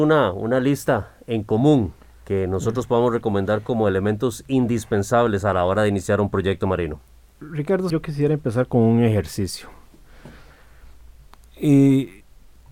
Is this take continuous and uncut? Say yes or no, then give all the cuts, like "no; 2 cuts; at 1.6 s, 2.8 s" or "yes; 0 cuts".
no; 1 cut; at 7.9 s